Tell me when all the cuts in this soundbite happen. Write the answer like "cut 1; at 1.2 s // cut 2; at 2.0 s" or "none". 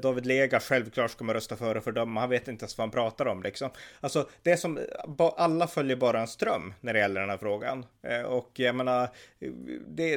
none

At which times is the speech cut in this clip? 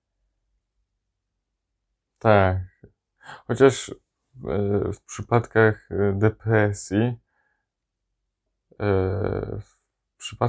none

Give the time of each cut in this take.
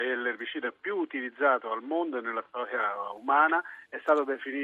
none

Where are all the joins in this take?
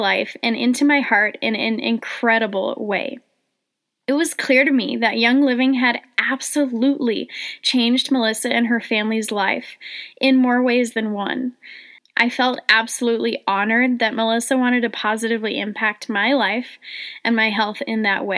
cut 1; at 12.0 s

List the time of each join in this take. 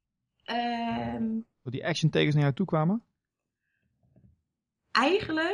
none

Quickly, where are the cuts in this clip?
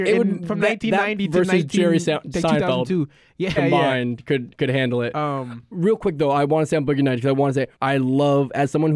cut 1; at 3.6 s // cut 2; at 7.8 s

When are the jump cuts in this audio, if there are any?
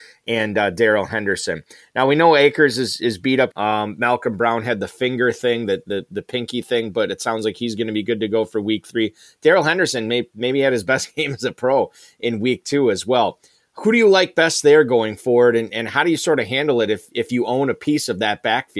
cut 1; at 3.5 s

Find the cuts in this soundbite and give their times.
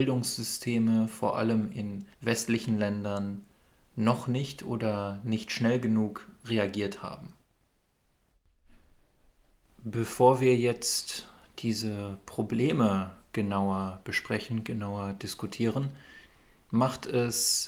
cut 1; at 2.1 s

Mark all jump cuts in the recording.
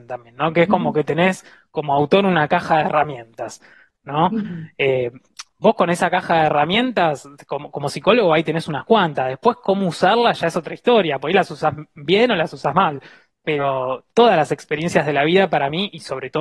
none

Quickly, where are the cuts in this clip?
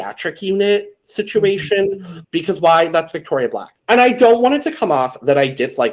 cut 1; at 2.2 s // cut 2; at 3.8 s

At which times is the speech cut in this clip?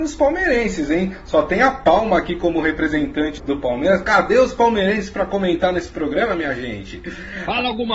cut 1; at 3.4 s

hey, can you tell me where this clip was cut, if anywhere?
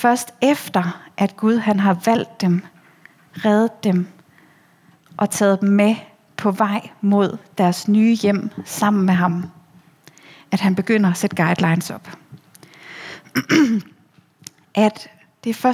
none

